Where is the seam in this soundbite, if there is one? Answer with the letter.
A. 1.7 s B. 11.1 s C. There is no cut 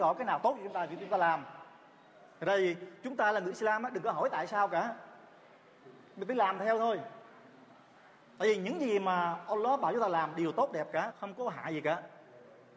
B